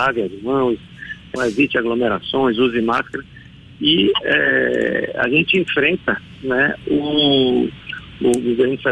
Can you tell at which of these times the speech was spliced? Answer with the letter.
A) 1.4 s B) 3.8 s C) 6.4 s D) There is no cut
A